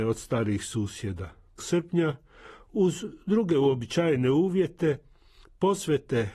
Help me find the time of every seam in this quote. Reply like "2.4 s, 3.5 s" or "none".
1.6 s